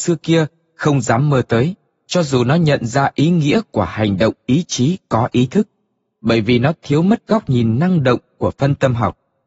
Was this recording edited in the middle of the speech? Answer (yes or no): no